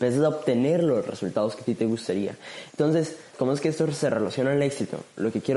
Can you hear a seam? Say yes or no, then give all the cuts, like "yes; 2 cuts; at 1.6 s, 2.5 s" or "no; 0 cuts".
yes; 1 cut; at 3.3 s